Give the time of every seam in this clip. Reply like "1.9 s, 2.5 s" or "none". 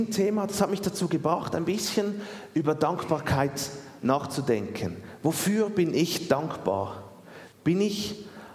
7.5 s